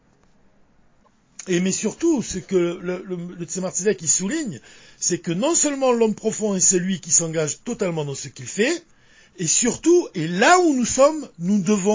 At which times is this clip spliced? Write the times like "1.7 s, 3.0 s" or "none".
none